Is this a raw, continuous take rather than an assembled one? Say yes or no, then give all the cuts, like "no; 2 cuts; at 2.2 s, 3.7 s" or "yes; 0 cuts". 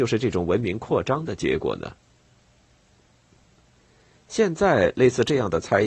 yes; 0 cuts